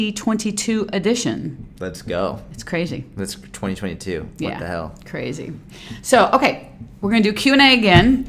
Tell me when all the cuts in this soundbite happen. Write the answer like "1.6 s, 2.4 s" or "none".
1.7 s